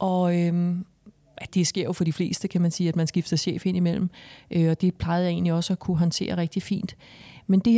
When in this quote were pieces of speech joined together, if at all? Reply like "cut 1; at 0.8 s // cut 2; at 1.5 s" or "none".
cut 1; at 1.5 s